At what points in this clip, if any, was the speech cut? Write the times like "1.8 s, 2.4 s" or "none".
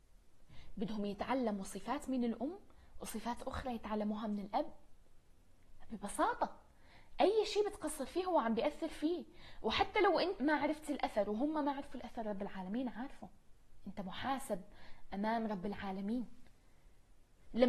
10.4 s

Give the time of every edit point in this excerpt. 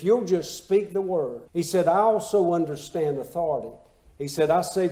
1.5 s

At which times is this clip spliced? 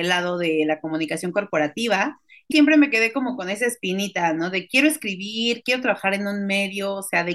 2.5 s

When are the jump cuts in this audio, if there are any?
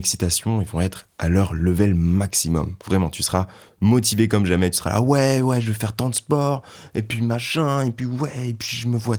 none

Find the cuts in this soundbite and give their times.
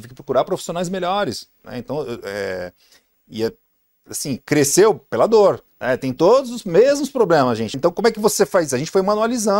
5.7 s, 7.7 s

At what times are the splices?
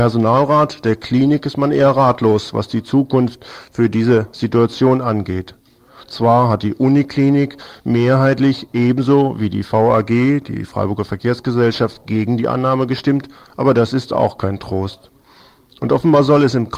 none

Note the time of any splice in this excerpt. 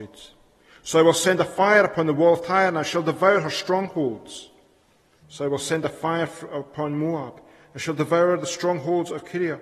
5.2 s

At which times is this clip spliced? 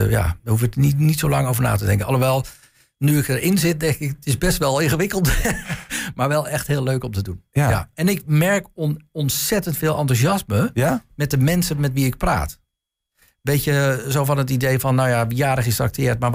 none

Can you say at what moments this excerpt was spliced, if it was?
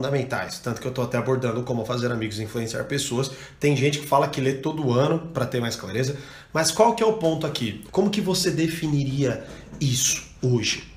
7.9 s

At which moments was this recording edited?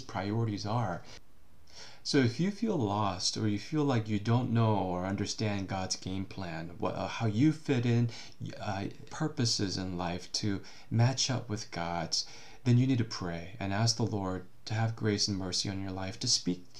9.1 s

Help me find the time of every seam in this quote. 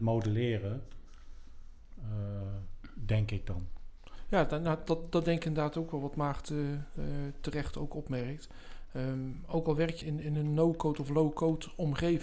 10.0 s

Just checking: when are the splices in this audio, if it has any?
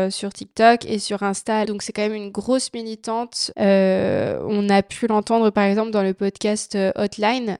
1.6 s, 3.5 s

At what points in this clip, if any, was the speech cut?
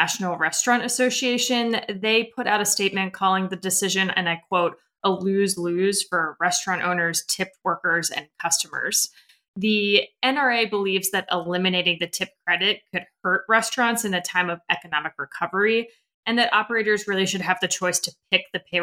none

